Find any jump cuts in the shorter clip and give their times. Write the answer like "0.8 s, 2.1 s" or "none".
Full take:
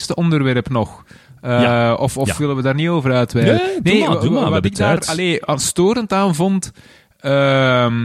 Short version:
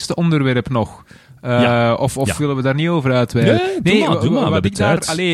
none